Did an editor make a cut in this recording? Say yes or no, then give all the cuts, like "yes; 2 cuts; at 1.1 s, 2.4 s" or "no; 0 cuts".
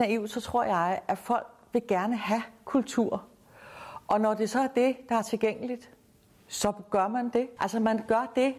yes; 1 cut; at 7.6 s